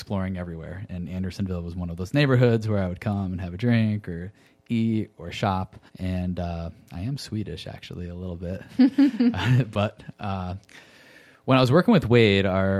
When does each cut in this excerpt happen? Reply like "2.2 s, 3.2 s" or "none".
5.9 s